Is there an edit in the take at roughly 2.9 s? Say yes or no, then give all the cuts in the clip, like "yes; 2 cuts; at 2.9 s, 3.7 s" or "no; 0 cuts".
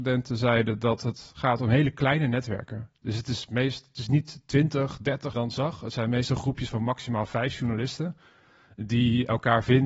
no; 1 cut; at 5.3 s